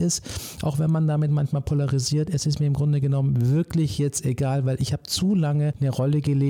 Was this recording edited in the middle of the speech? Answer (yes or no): no